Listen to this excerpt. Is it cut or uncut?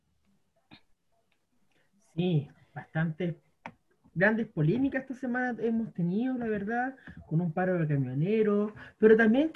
uncut